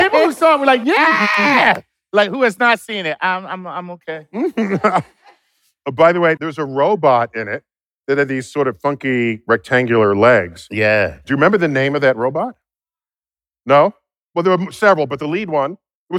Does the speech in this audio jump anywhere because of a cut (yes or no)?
yes